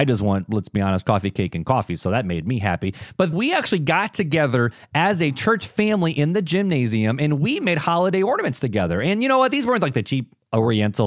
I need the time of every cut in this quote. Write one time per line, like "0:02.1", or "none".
0:03.3